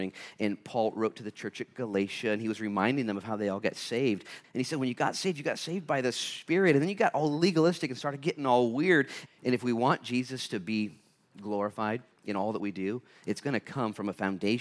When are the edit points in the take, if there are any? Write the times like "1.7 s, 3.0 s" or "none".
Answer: 4.4 s, 9.3 s